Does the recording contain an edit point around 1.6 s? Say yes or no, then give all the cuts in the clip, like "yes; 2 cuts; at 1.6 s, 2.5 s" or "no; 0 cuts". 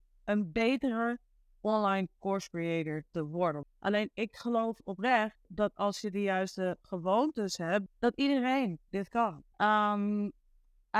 no; 3 cuts; at 3.6 s, 7.9 s, 9.5 s